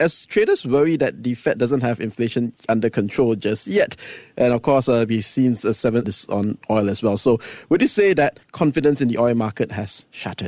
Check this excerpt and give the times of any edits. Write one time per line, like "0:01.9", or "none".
0:06.0

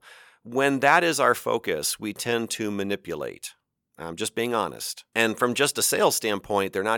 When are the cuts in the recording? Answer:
0:05.1

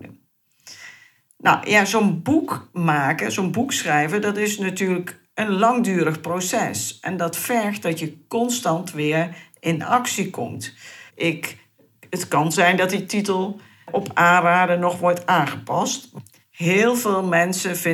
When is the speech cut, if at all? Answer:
0:11.1
0:16.4

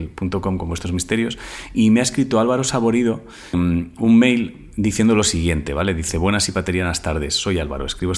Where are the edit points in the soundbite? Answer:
0:03.5

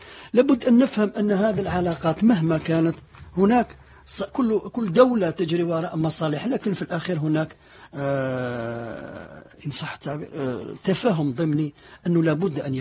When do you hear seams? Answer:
none

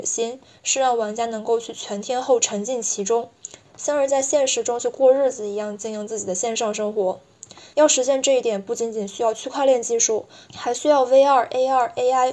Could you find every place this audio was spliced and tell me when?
none

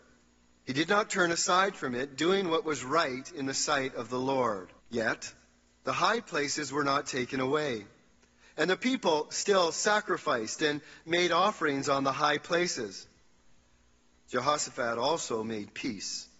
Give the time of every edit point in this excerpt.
0:04.8

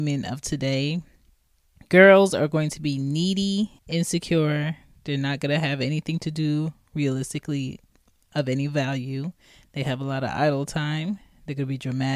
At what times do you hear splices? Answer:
0:03.8

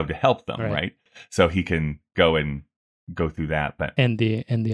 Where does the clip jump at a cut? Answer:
none

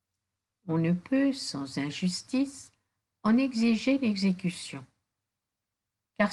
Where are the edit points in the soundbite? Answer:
none

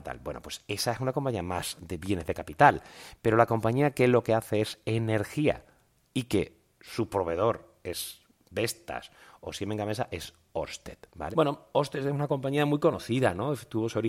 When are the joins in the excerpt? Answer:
0:11.3

